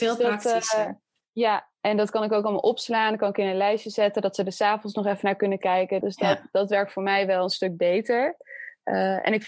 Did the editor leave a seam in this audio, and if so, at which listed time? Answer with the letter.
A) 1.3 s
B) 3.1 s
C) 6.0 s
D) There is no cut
C